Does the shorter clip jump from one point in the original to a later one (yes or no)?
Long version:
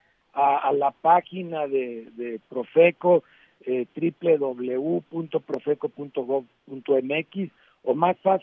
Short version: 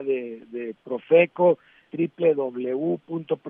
yes